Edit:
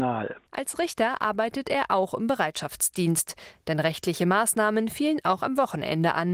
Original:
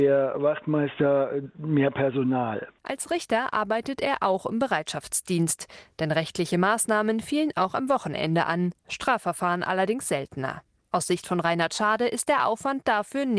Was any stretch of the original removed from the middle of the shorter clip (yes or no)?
no